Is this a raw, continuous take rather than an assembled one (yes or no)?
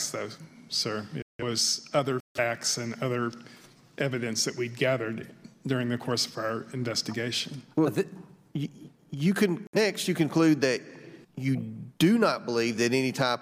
no